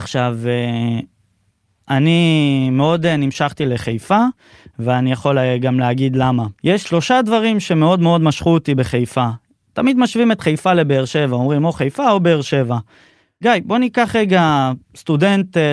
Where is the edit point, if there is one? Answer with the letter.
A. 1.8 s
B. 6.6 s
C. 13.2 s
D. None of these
B